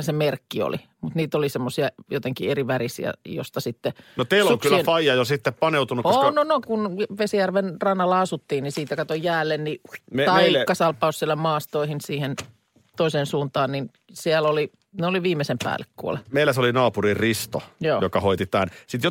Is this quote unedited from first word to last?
no; 2 cuts; at 6.6 s, 10.0 s

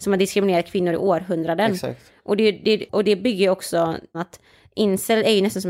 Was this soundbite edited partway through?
yes; 2 cuts; at 2.9 s, 4.1 s

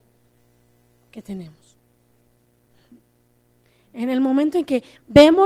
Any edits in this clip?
no; 0 cuts

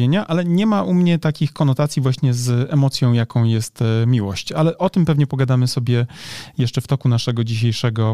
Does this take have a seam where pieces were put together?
no; 0 cuts

